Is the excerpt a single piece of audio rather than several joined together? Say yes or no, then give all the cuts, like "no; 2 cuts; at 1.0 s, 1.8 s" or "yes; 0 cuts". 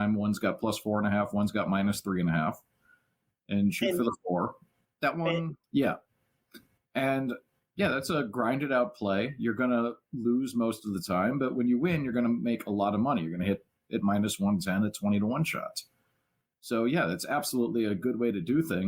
no; 1 cut; at 5.6 s